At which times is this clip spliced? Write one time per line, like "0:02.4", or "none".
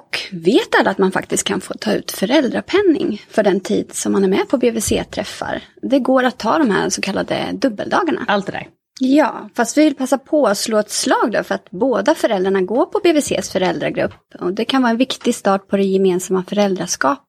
0:08.3